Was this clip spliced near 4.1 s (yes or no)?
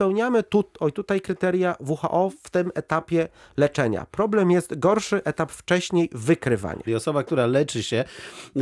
no